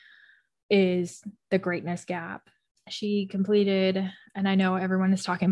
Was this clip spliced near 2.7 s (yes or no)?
yes